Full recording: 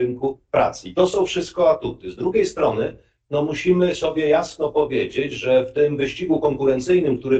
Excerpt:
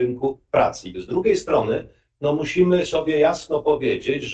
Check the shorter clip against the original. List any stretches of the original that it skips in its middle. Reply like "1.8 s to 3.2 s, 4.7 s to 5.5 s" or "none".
0.9 s to 2.0 s